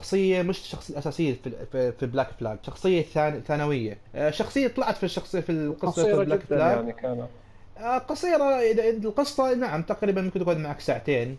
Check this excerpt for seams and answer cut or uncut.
uncut